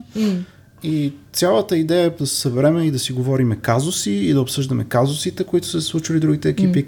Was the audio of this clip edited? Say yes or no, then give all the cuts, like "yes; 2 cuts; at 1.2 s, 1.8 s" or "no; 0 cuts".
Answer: yes; 1 cut; at 2.2 s